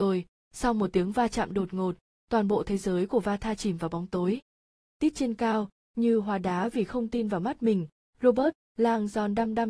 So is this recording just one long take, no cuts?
yes; 0 cuts

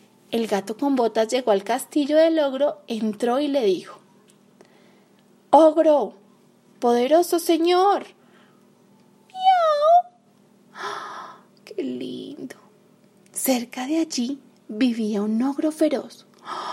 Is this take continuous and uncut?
no; 1 cut; at 10.6 s

